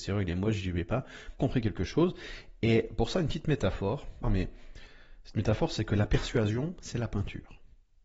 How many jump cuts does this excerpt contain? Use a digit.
2